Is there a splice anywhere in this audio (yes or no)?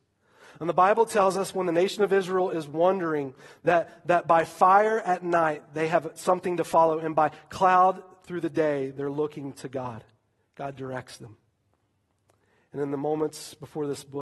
no